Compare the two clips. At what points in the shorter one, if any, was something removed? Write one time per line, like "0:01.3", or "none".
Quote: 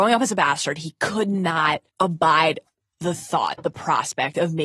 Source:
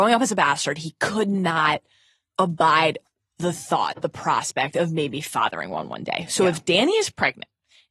0:01.9